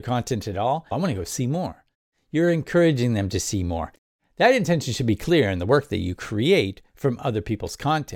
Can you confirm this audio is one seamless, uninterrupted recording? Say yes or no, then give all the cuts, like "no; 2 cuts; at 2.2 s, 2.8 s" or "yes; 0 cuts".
no; 1 cut; at 0.9 s